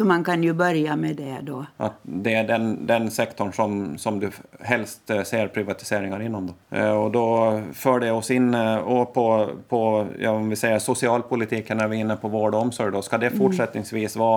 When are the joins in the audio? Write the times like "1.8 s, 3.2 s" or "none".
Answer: 6.6 s